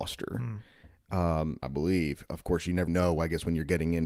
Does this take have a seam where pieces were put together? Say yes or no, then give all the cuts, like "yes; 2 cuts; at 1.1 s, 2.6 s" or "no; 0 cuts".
yes; 2 cuts; at 1.6 s, 2.9 s